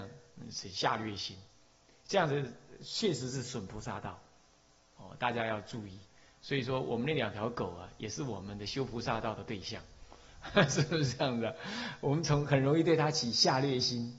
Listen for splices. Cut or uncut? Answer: uncut